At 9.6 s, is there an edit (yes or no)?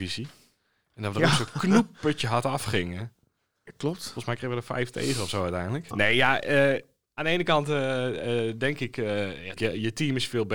yes